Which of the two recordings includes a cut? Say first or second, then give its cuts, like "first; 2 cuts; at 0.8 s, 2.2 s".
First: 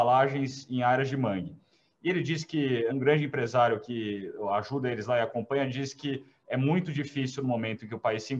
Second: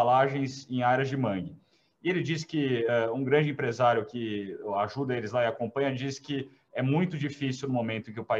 first; 1 cut; at 2.9 s